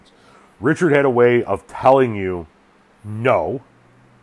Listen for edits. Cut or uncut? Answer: uncut